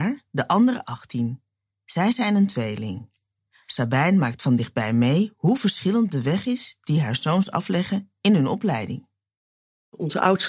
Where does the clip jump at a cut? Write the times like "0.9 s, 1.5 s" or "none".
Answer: none